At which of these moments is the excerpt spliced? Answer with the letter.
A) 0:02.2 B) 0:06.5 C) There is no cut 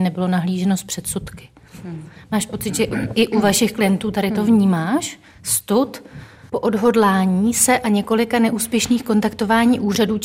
B